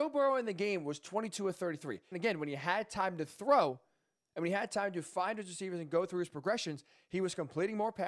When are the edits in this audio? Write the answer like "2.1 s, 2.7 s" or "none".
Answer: 2.1 s

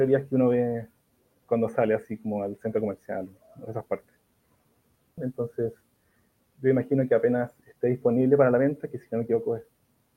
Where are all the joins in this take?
5.2 s

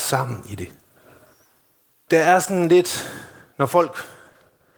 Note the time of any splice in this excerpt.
2.1 s

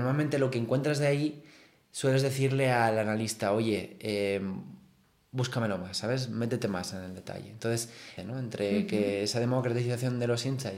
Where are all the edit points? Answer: 8.2 s

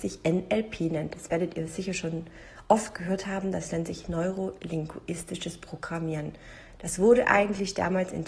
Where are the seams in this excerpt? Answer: none

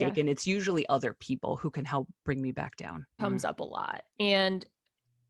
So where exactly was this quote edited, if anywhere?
3.2 s

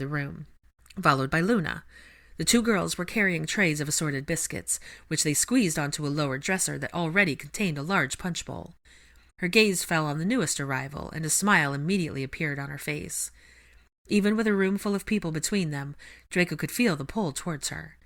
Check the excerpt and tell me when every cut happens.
9.3 s

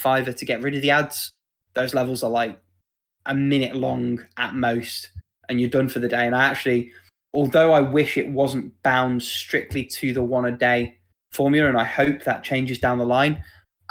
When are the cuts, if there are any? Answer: 1.6 s, 5.4 s

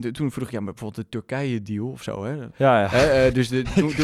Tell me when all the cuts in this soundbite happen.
2.5 s

